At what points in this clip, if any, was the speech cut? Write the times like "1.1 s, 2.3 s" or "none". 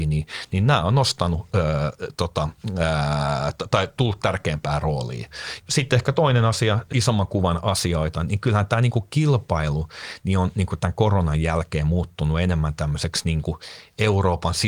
5.6 s, 6.9 s

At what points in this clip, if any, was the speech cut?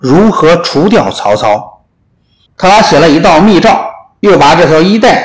2.5 s, 4.2 s

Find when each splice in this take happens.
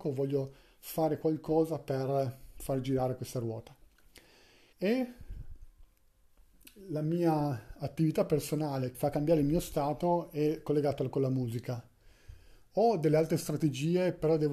4.7 s, 8.9 s

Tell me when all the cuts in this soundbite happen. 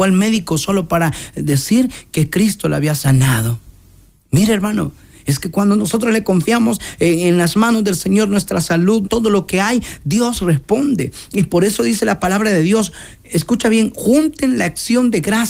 9.0 s

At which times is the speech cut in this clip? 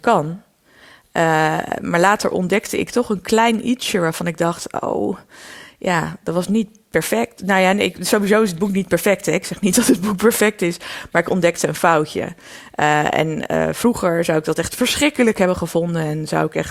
none

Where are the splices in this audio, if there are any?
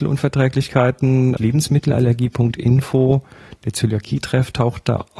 1.4 s

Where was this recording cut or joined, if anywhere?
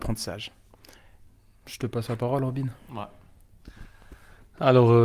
none

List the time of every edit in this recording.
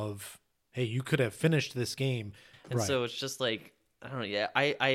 2.5 s

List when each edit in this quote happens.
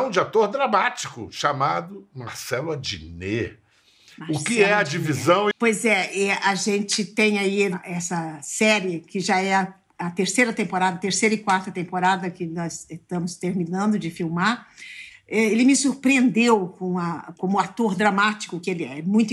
5.5 s, 17.4 s

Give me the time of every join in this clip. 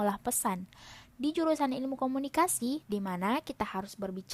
2.8 s

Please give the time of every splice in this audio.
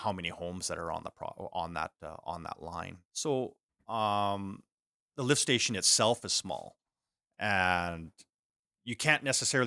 3.0 s

